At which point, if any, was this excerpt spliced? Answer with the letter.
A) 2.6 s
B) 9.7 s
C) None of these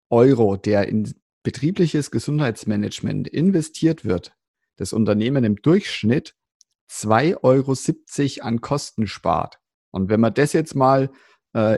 B